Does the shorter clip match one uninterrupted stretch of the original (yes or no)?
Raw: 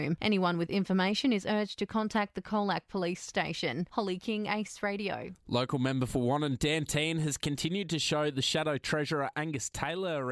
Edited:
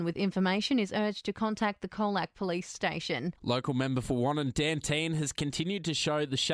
no